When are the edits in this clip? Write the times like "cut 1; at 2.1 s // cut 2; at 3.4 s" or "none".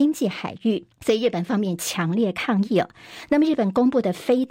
cut 1; at 0.9 s